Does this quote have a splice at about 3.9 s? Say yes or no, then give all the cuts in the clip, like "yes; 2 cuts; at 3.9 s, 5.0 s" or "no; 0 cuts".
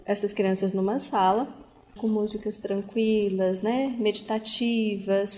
no; 1 cut; at 2.0 s